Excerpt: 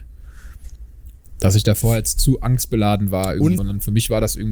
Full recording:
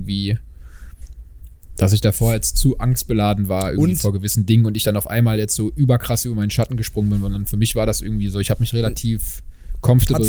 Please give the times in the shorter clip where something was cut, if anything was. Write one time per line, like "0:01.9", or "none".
0:03.6

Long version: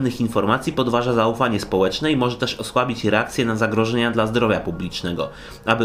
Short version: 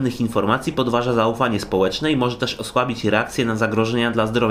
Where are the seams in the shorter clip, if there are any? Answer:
none

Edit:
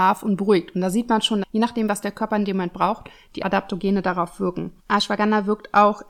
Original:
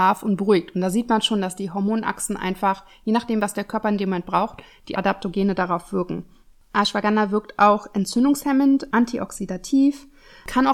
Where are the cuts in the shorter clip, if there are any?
0:01.4
0:04.8

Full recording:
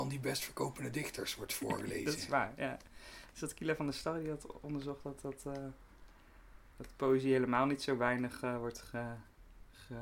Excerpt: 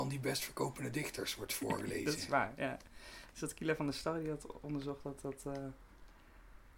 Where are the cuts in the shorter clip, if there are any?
none

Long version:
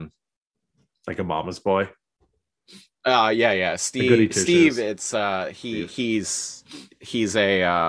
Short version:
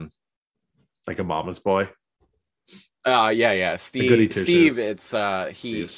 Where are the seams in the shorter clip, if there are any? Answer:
none

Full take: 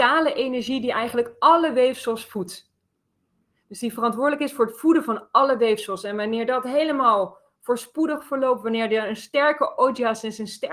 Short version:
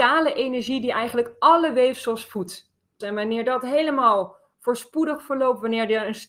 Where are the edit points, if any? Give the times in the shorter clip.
0:03.0

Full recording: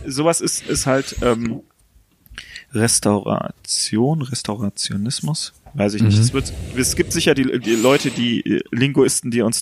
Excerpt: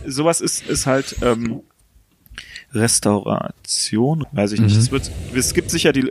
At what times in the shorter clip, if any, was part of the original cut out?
0:04.2

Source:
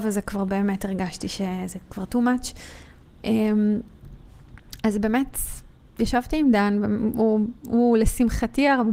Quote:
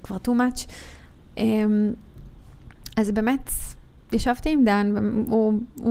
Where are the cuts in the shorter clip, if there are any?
none

